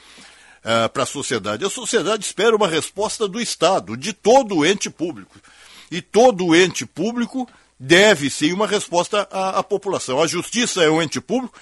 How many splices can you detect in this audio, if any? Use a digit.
0